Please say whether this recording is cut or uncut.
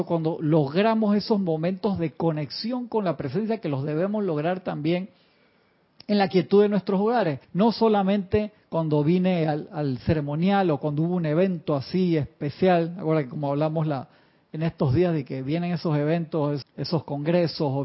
cut